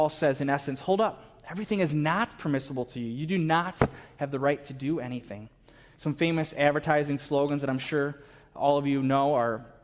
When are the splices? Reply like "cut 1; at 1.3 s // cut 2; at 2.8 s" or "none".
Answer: cut 1; at 5.9 s

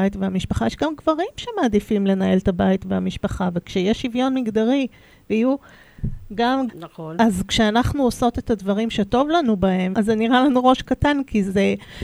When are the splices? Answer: cut 1; at 6.7 s // cut 2; at 9.9 s

